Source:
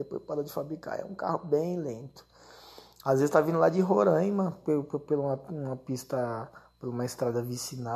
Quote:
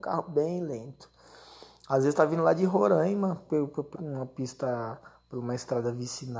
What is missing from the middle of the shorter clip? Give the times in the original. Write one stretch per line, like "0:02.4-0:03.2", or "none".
0:05.1-0:05.4